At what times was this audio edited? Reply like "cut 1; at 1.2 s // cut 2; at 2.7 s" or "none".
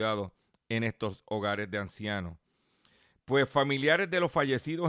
none